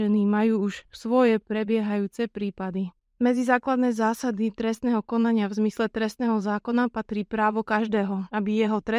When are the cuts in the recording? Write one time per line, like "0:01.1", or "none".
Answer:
none